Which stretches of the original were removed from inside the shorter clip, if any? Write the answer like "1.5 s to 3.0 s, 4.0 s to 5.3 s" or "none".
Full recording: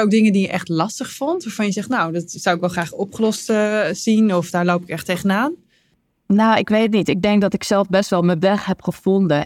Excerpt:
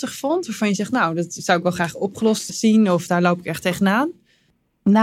3.5 s to 3.9 s